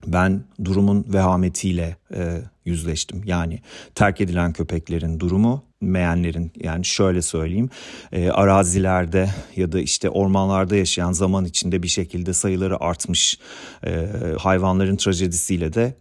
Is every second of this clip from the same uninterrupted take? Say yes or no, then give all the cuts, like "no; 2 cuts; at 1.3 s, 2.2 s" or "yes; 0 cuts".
no; 2 cuts; at 5.7 s, 14.4 s